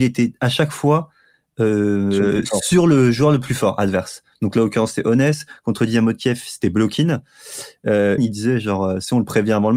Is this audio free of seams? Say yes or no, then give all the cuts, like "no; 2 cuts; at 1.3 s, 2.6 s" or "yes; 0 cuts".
no; 1 cut; at 8.2 s